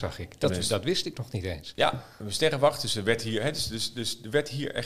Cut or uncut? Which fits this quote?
uncut